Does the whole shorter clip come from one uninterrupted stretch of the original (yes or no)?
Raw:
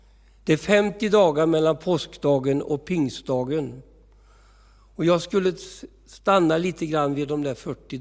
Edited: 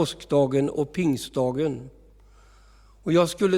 yes